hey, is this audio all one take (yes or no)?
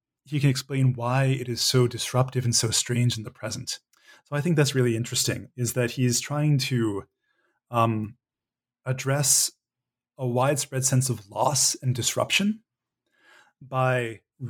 yes